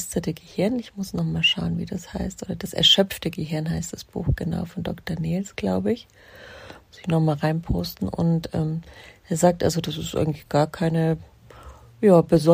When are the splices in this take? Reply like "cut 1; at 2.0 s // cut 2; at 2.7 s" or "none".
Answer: none